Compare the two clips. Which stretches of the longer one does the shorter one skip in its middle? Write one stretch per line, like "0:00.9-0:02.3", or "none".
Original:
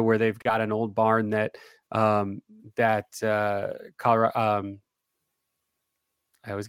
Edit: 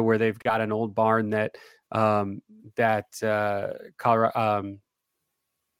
none